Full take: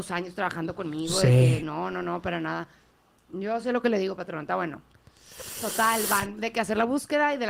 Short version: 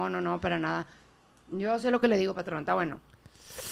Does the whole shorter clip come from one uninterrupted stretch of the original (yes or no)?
yes